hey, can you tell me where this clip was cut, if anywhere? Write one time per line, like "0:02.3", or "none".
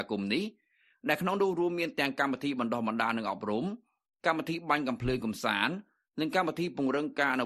none